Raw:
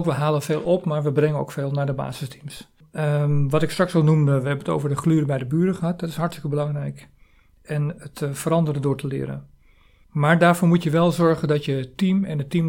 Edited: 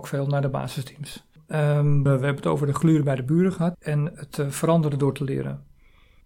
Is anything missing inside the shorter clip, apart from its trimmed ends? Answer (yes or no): yes